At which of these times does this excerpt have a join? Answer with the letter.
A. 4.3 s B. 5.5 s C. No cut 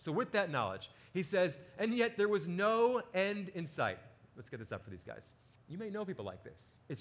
B